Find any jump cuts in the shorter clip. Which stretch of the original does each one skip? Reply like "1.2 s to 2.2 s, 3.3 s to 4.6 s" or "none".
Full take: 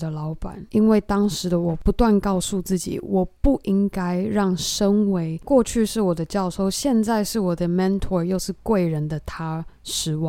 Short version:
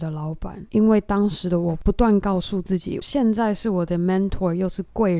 3.0 s to 6.7 s